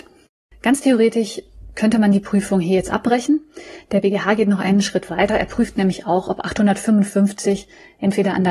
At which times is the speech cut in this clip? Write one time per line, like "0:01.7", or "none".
none